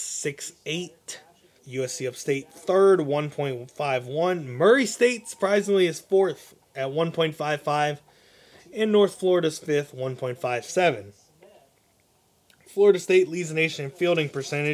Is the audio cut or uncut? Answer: cut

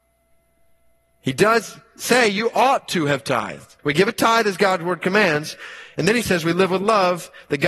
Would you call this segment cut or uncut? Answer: cut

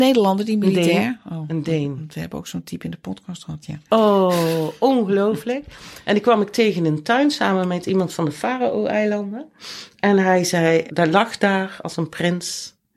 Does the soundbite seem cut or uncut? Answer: cut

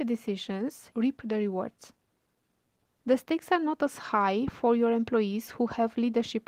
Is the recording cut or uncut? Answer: cut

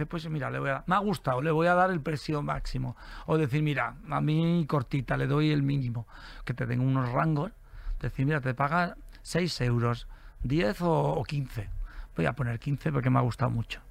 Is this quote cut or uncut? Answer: uncut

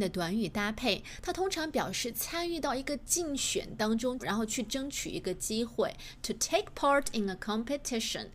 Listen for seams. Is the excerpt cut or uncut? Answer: cut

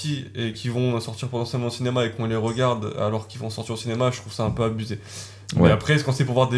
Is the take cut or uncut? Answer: uncut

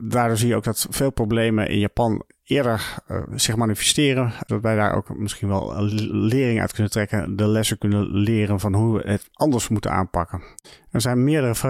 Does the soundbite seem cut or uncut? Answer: uncut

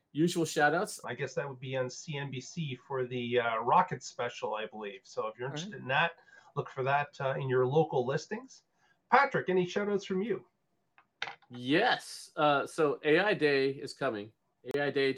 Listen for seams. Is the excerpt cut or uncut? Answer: cut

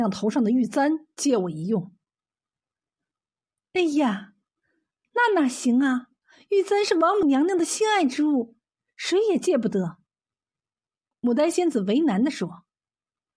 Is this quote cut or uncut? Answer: uncut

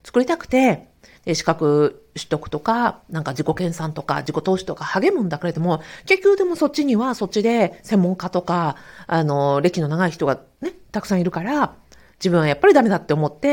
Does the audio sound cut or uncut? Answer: uncut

